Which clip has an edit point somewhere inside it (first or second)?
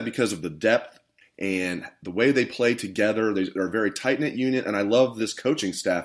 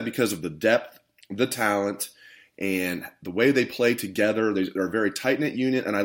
first